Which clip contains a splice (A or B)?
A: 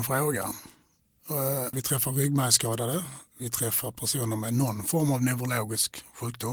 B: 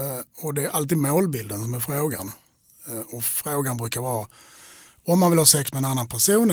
A